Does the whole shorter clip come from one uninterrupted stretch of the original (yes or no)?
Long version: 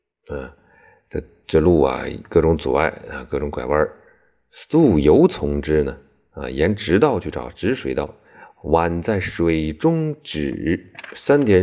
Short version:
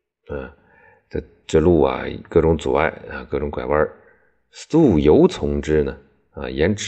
yes